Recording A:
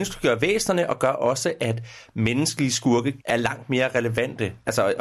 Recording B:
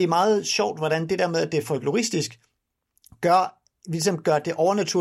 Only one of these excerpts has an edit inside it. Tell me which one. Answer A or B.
A